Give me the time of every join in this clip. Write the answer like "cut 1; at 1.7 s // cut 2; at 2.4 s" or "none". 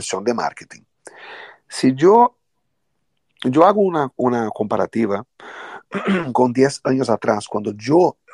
none